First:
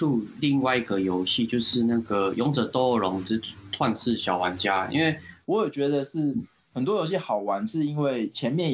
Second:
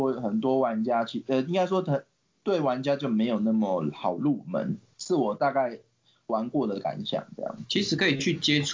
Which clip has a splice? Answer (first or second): first